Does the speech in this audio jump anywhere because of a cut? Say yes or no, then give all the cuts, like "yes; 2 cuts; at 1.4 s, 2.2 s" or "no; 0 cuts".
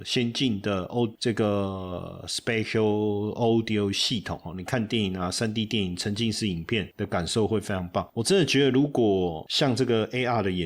no; 0 cuts